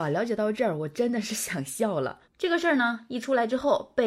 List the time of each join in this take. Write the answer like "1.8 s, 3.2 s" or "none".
2.2 s